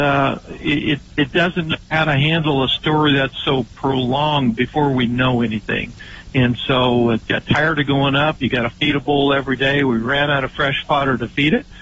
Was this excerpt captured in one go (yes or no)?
yes